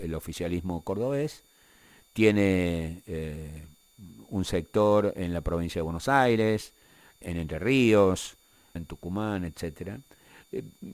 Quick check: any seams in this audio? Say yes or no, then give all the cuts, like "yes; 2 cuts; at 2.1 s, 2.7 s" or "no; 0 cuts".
yes; 2 cuts; at 7.2 s, 8.8 s